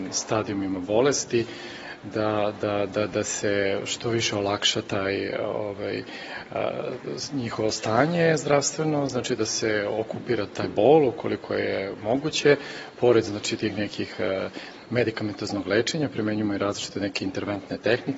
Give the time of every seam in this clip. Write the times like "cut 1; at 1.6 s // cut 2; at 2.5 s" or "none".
none